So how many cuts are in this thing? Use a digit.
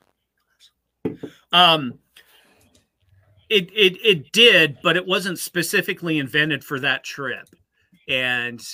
0